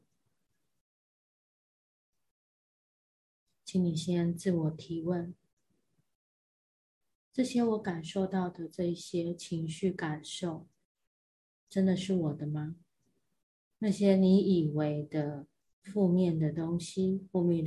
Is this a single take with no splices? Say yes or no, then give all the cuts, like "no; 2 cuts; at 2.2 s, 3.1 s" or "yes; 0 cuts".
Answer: no; 1 cut; at 13.8 s